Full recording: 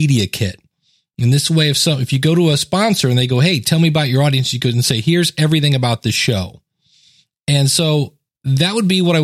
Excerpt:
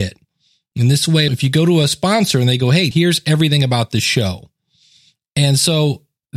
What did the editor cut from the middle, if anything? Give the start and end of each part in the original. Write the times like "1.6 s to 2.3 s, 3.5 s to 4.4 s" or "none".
1.7 s to 2.0 s, 3.6 s to 5.0 s